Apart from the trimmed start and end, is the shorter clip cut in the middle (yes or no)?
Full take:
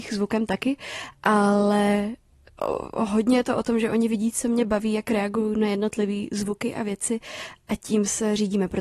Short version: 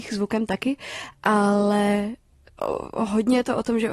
no